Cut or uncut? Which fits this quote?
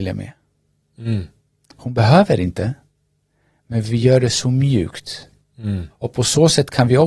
cut